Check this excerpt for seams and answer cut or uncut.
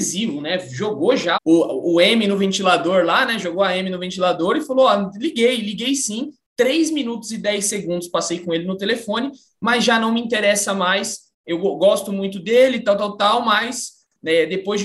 cut